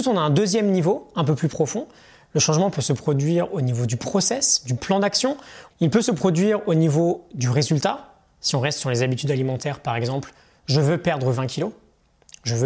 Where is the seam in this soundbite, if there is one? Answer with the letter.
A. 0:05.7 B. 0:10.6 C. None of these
A